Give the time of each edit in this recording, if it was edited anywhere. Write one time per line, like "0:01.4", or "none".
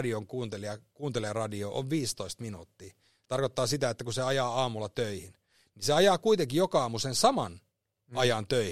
none